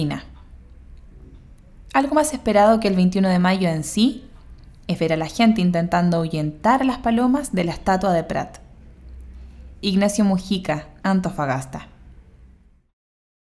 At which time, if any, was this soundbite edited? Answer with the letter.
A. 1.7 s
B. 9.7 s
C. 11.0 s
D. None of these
C